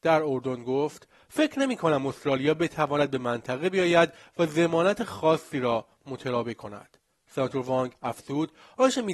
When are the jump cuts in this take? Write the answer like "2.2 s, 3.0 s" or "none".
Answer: none